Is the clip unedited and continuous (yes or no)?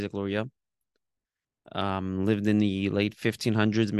yes